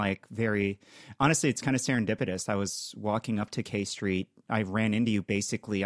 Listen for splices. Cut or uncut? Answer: uncut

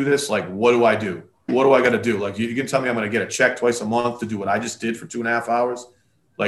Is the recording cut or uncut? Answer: cut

